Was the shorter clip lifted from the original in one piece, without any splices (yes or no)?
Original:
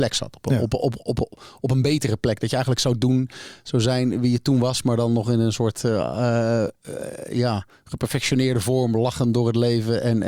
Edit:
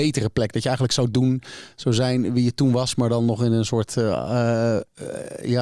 yes